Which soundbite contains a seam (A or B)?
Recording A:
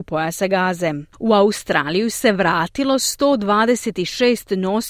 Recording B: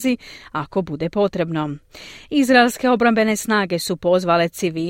A